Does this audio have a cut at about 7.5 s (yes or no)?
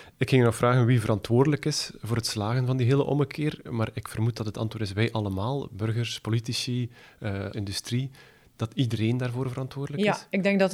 yes